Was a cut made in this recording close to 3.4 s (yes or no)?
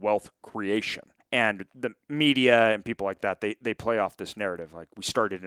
no